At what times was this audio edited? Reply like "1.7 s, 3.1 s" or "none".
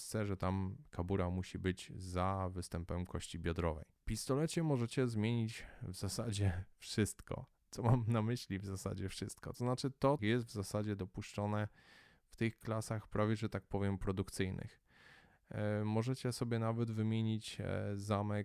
10.2 s